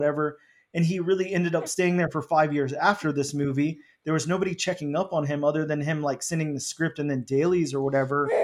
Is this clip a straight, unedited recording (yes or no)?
yes